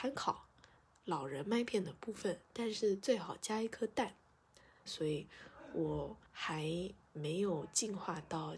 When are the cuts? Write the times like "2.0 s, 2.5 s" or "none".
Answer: 4.9 s, 6.3 s